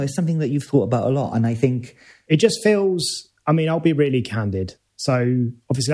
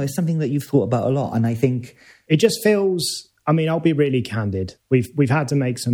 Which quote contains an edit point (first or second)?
second